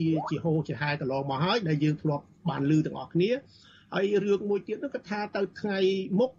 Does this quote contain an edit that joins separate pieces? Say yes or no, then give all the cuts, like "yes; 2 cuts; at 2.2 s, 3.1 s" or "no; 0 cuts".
no; 0 cuts